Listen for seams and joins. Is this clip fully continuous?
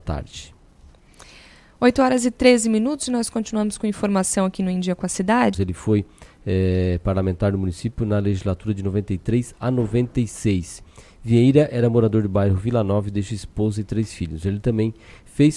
no; 1 cut; at 5.5 s

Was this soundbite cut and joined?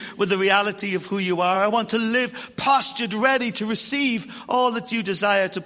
no; 0 cuts

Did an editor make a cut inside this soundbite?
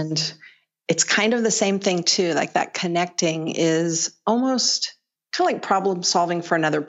yes; 1 cut; at 5.2 s

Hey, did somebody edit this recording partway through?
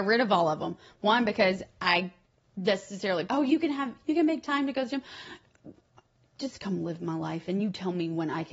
yes; 1 cut; at 3.3 s

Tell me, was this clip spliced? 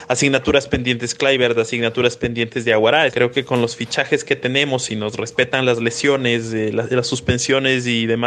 yes; 1 cut; at 3.1 s

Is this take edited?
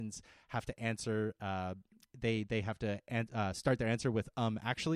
yes; 1 cut; at 2.1 s

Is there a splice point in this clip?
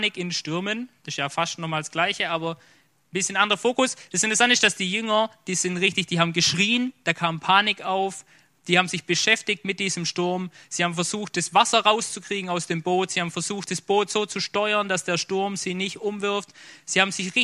no; 0 cuts

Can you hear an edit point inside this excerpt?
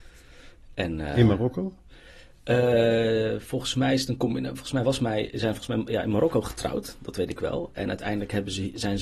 no; 0 cuts

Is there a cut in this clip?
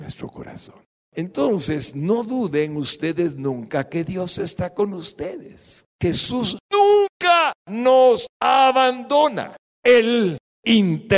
yes; 1 cut; at 5.9 s

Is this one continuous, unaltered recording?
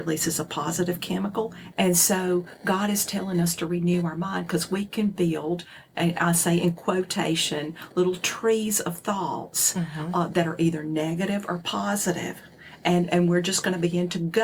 no; 1 cut; at 1.7 s

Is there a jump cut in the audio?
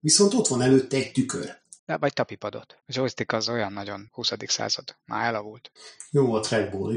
yes; 1 cut; at 1.8 s

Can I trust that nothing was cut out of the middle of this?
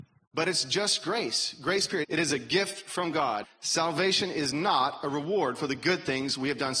no; 2 cuts; at 2.0 s, 3.4 s

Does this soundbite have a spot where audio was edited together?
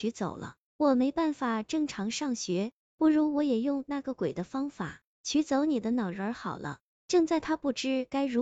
yes; 1 cut; at 6.9 s

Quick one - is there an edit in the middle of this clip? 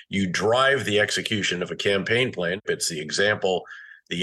yes; 1 cut; at 2.6 s

